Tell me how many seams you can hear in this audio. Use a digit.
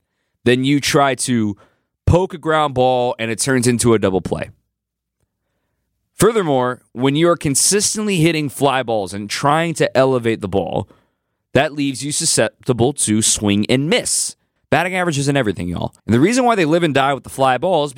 2